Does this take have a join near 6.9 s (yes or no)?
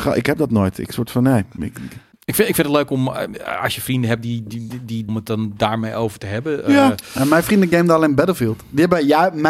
no